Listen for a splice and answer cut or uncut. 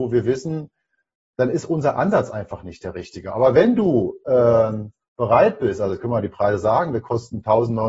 uncut